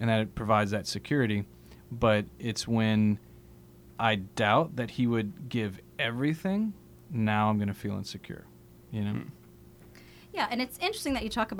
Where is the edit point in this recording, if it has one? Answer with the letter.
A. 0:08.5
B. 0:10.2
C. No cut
C